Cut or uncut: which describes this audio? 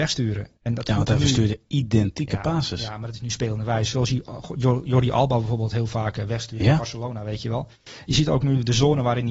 uncut